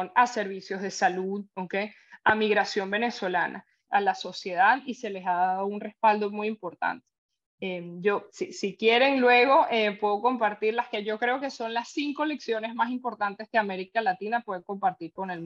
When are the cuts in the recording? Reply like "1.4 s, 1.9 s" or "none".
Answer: 3.9 s